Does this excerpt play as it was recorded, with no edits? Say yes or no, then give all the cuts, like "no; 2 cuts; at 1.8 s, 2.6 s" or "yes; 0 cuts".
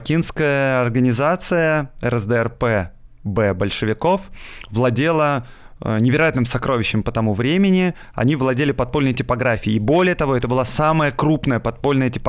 yes; 0 cuts